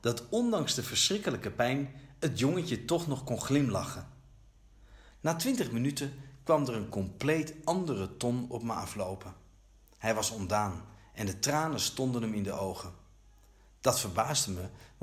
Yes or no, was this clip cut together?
yes